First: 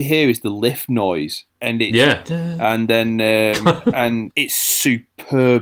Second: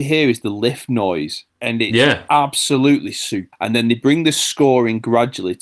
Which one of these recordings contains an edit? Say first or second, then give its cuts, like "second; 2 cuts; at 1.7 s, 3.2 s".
first; 1 cut; at 2.2 s